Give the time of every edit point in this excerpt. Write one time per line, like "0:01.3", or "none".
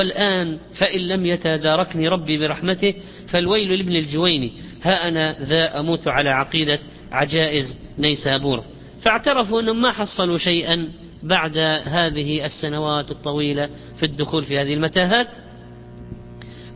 0:03.3